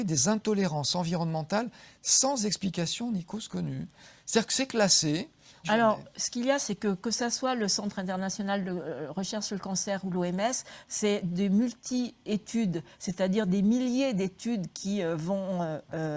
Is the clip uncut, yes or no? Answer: no